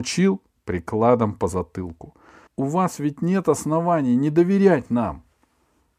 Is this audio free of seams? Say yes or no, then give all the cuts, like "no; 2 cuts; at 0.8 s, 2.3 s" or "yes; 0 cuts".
no; 1 cut; at 2.5 s